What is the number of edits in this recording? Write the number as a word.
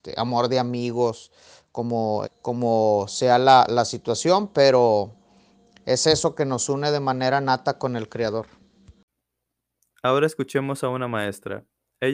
one